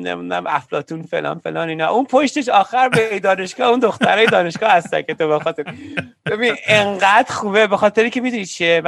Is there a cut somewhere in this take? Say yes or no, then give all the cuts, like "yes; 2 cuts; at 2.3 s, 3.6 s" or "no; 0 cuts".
no; 0 cuts